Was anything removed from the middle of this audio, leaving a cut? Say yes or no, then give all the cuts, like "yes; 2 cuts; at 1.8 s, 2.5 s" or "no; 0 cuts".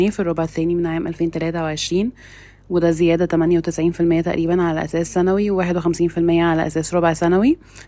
no; 0 cuts